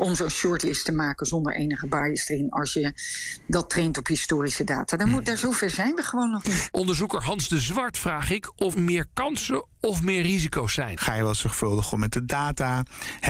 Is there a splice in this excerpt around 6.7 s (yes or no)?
no